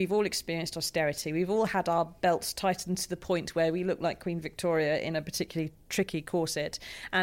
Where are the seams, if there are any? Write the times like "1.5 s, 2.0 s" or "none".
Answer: none